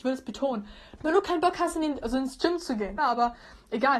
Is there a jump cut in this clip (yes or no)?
yes